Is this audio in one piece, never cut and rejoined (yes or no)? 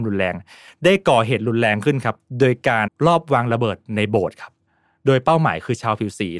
no